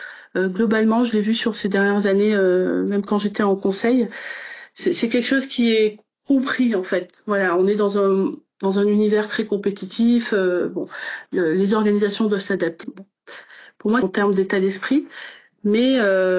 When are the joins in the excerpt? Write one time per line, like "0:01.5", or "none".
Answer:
0:12.8
0:14.0